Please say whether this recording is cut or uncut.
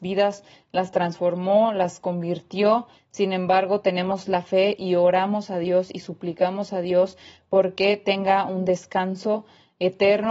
cut